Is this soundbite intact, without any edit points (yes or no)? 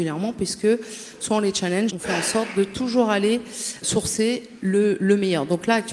no